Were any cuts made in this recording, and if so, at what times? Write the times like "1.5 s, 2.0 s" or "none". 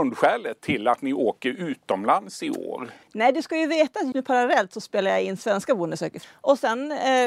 3.0 s, 4.1 s, 6.2 s